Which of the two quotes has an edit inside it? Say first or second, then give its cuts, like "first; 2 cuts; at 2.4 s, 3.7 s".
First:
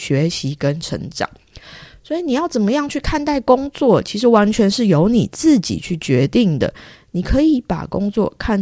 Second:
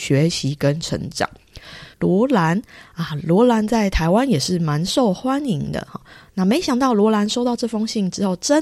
second; 2 cuts; at 1.9 s, 6.3 s